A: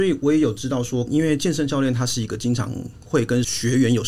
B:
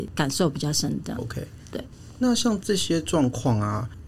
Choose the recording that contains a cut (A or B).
A